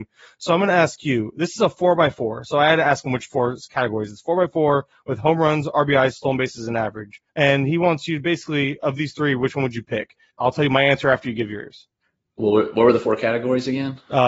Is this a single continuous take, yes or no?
no